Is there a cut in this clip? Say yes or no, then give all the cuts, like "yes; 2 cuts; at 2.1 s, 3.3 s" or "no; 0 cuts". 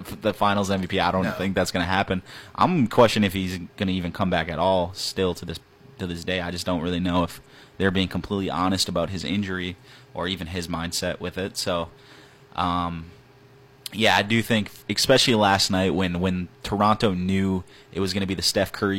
no; 0 cuts